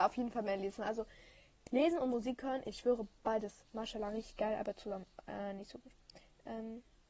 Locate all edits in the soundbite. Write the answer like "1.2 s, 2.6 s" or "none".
none